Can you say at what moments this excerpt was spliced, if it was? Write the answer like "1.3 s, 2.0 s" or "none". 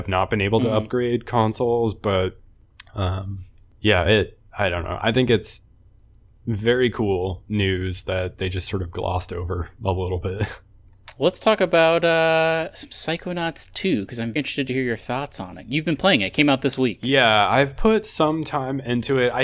14.4 s